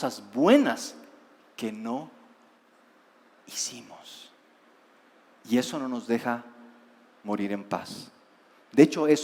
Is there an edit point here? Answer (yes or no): no